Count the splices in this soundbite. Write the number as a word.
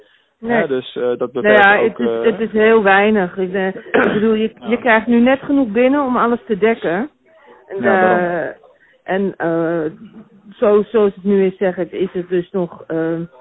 zero